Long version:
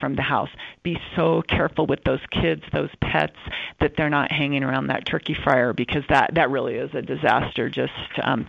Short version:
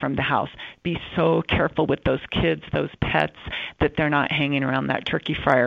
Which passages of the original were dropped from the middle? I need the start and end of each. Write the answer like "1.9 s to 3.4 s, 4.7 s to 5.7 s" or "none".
none

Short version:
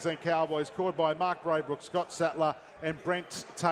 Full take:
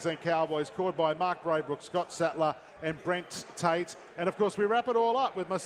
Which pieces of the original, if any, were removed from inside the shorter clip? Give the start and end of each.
none

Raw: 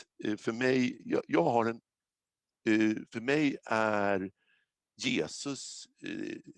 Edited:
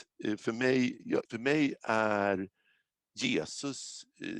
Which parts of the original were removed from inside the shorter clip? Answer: 1.3 s to 3.1 s

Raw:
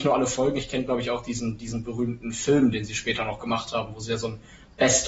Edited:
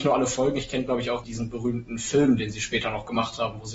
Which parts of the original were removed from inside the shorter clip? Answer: 1.2 s to 1.6 s

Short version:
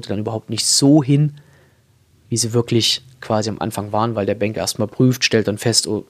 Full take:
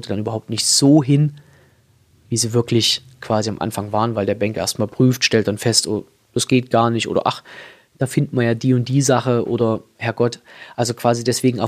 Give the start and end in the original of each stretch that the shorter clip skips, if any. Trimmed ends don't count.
none

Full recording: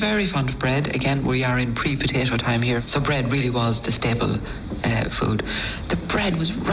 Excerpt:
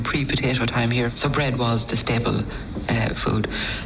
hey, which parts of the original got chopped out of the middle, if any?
3.3 s to 3.5 s

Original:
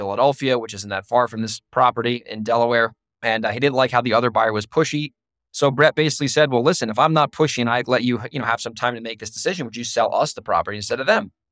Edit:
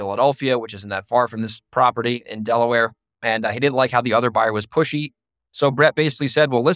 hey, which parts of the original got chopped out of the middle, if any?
none

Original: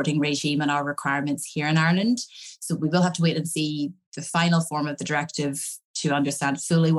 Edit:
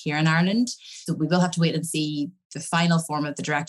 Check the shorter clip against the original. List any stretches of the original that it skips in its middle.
2.6 s to 2.7 s

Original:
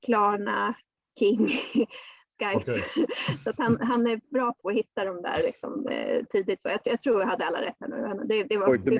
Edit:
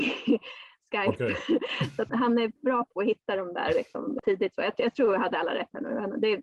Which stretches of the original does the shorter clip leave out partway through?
3.6 s to 3.8 s, 5.9 s to 6.3 s

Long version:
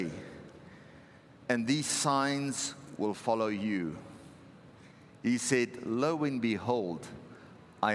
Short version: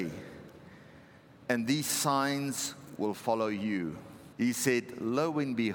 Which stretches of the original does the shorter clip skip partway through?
4.3 s to 5.2 s

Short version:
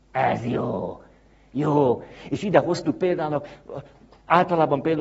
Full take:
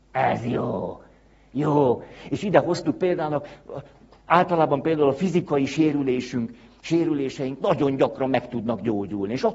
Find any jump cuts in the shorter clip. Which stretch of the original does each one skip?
none

